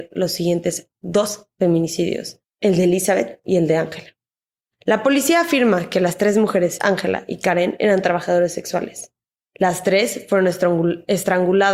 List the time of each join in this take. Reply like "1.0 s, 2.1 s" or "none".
6.8 s